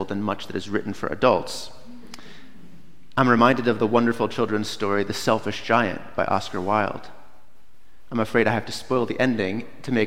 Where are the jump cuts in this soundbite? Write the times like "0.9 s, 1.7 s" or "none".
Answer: none